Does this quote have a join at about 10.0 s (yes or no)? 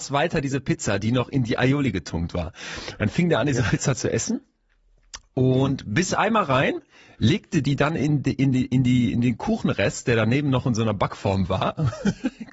no